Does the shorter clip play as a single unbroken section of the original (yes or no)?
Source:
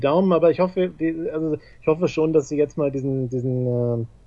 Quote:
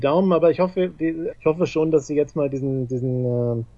no